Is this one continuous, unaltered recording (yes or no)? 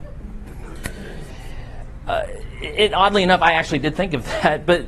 yes